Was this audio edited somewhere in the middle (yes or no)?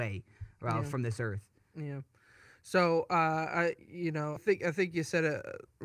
yes